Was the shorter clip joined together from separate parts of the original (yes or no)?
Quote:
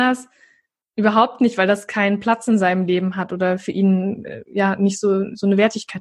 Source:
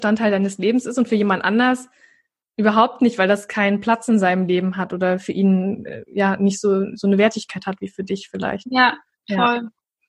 no